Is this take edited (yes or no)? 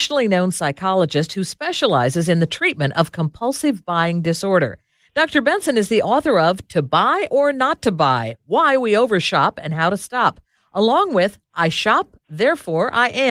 no